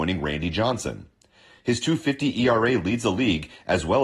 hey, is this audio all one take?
yes; 0 cuts

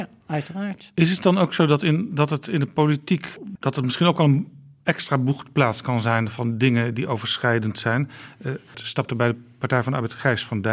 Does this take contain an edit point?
yes; 2 cuts; at 3.6 s, 8.7 s

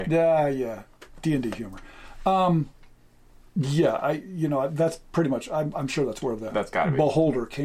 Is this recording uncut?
yes; 0 cuts

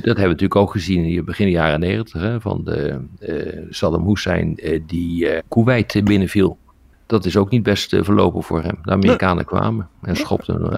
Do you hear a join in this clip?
yes; 1 cut; at 5.4 s

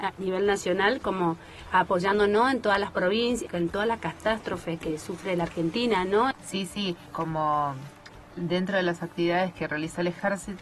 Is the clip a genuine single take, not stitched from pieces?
no; 2 cuts; at 3.5 s, 6.3 s

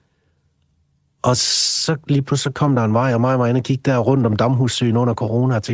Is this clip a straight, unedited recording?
yes; 0 cuts

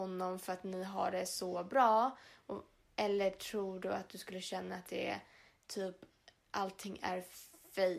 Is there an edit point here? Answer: no; 0 cuts

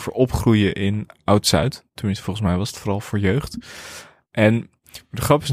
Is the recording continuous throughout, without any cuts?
yes; 0 cuts

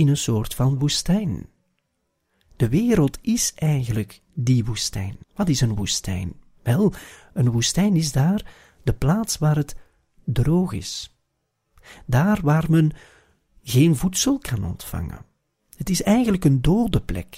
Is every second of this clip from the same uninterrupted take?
no; 1 cut; at 5.2 s

